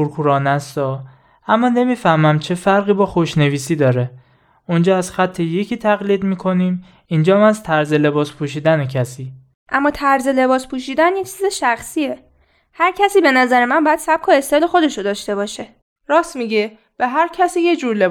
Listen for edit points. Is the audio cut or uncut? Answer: uncut